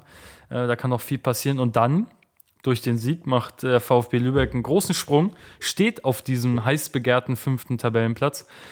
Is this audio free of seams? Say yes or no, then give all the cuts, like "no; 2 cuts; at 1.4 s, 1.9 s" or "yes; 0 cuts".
yes; 0 cuts